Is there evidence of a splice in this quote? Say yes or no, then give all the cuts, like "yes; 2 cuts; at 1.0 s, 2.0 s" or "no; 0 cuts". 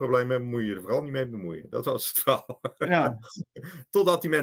no; 0 cuts